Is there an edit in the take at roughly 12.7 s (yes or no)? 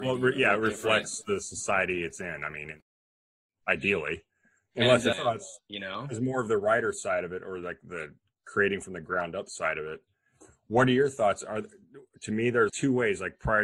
yes